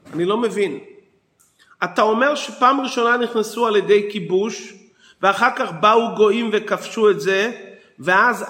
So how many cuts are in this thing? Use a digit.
0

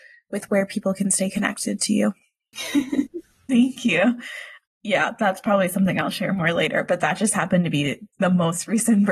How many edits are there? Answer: 1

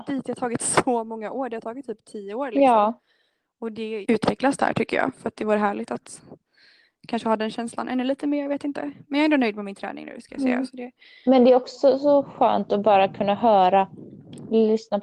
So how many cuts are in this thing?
1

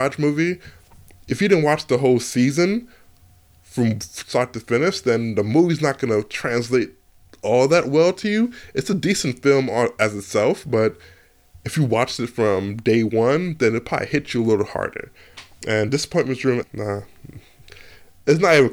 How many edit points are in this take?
1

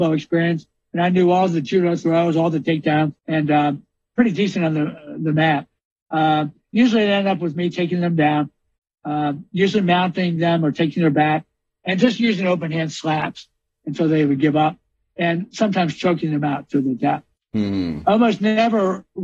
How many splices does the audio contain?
1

